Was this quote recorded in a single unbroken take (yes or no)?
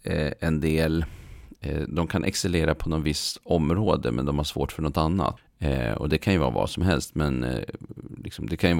no